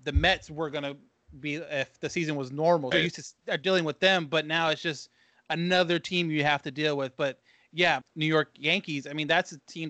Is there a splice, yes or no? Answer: yes